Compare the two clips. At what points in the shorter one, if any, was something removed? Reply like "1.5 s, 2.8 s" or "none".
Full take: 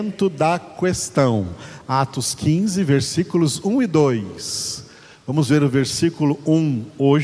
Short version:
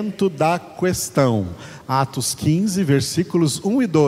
none